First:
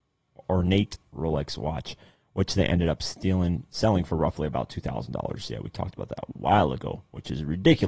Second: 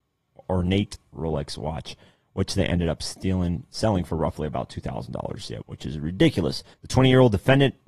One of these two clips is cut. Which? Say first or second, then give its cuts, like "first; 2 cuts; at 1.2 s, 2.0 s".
second; 2 cuts; at 5.6 s, 6.7 s